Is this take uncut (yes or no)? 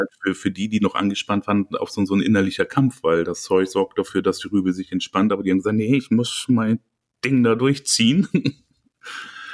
yes